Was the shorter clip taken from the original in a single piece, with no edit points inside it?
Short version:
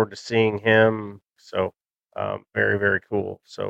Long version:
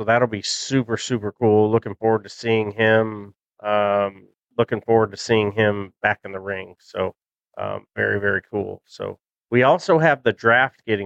no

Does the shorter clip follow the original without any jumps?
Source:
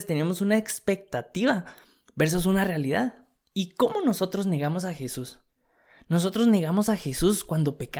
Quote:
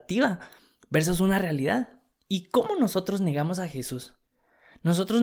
yes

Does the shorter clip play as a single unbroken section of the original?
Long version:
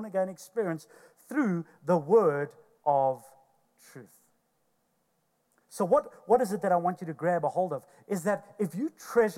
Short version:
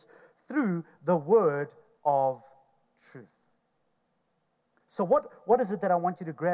yes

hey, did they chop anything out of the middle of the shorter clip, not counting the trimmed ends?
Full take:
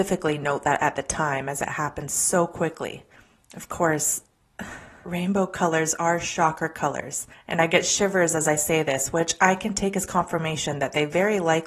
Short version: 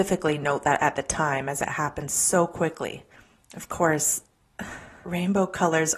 no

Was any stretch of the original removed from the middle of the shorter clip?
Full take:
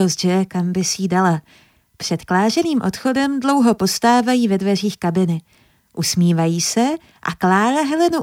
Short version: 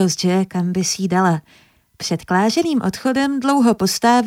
no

